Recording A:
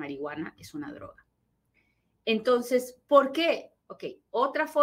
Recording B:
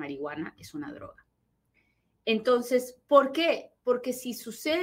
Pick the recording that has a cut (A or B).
A